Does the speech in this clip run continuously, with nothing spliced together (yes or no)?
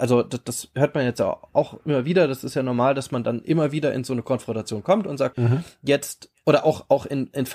no